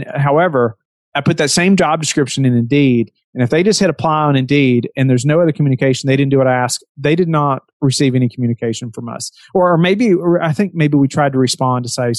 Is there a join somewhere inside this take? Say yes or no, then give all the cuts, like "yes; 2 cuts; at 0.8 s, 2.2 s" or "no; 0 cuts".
no; 0 cuts